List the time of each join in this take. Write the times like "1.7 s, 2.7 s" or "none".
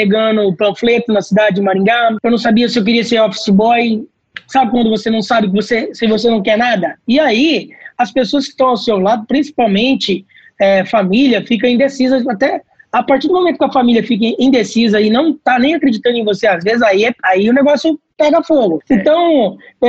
7.0 s